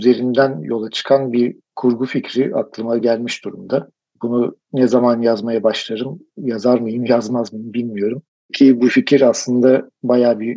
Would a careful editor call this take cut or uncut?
uncut